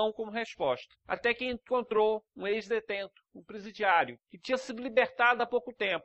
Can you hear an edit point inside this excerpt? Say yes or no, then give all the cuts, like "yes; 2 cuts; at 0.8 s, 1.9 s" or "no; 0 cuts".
no; 0 cuts